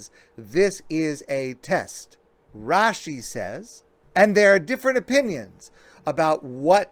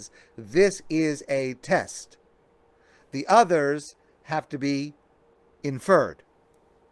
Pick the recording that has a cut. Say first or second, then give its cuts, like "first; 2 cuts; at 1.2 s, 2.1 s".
first; 1 cut; at 2.5 s